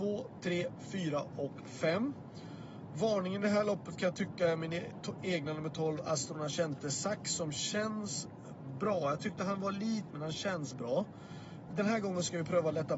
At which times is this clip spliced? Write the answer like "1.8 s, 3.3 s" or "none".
10.1 s, 11.7 s